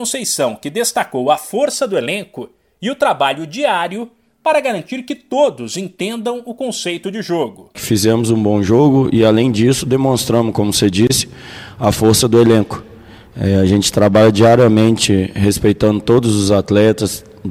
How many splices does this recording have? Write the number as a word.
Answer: zero